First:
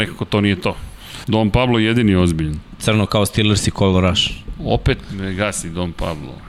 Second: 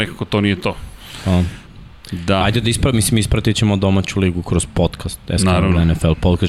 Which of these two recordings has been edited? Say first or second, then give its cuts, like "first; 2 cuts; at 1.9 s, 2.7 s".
first; 1 cut; at 1.2 s